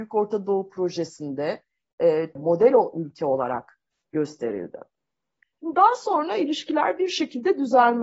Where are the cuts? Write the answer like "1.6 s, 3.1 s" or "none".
2.4 s, 5.4 s